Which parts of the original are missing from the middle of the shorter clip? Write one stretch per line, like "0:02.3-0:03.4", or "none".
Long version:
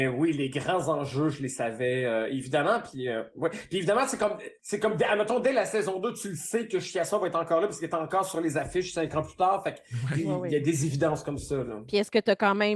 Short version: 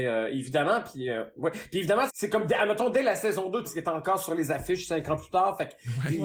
0:04.1-0:04.6
0:06.1-0:07.7